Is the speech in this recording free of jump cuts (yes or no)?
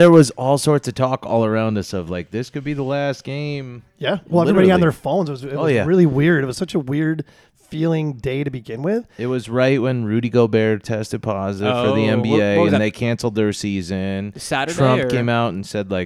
yes